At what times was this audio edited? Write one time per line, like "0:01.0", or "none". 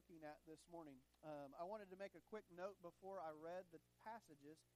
none

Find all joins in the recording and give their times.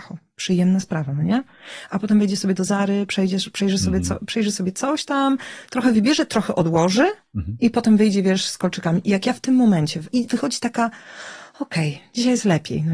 0:10.1

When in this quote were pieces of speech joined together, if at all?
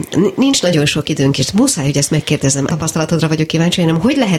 0:02.7

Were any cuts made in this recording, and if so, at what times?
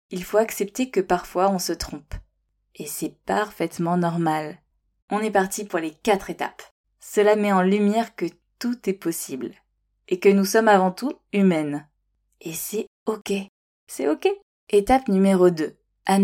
0:05.0
0:06.8
0:14.5

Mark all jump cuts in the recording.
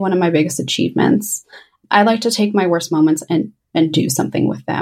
none

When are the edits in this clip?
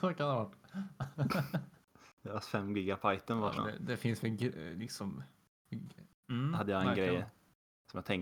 0:03.6
0:06.1

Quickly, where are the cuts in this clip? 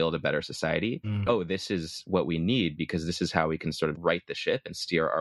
0:01.3

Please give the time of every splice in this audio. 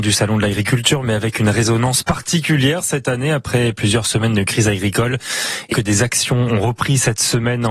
0:05.7

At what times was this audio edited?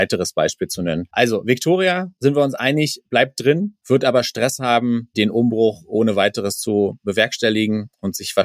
none

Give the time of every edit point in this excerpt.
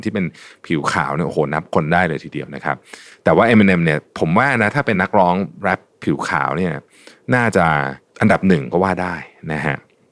0:04.9

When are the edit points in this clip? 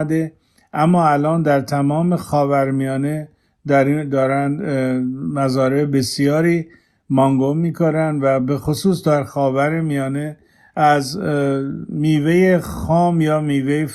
none

